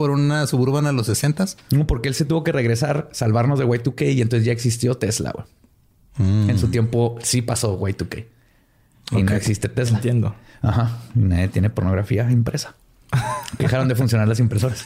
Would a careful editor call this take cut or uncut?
uncut